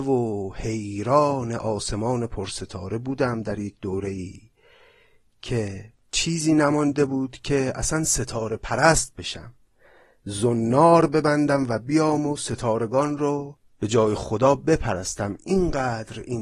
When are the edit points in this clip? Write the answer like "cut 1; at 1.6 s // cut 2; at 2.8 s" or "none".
none